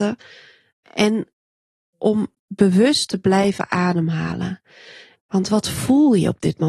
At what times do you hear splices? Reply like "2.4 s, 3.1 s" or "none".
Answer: 5.1 s

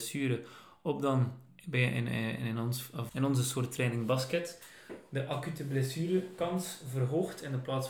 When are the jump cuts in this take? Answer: 3.1 s

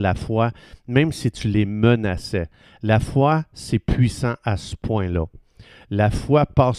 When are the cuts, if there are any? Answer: none

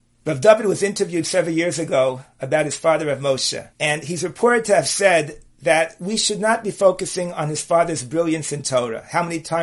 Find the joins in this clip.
3.7 s

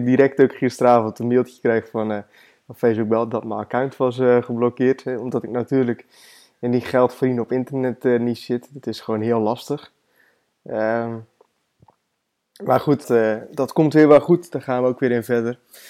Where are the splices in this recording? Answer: 13.0 s

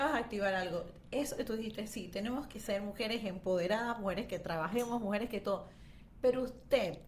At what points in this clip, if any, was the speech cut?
none

